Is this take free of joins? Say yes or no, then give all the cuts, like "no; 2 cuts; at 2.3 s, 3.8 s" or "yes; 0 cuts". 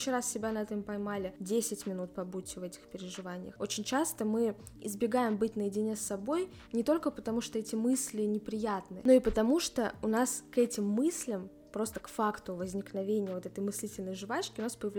no; 1 cut; at 3.6 s